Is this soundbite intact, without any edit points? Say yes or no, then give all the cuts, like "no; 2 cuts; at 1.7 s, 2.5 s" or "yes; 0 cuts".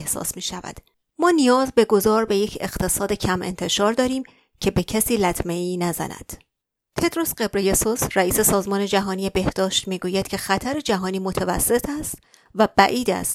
no; 1 cut; at 6.8 s